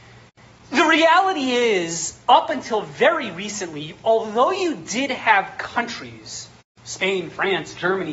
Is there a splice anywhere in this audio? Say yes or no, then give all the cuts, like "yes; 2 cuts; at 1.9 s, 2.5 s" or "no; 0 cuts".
no; 0 cuts